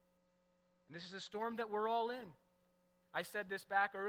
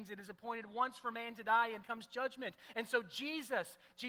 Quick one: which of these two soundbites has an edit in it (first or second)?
second